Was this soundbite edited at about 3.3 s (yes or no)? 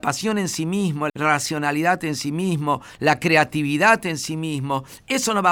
no